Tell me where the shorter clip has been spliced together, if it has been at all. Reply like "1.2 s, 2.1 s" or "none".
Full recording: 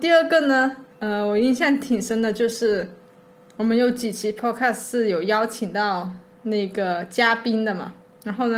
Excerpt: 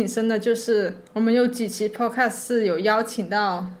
1.1 s